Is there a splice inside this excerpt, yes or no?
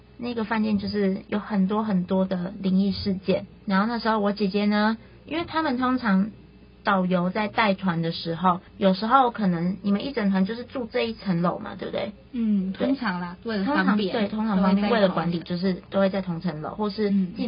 no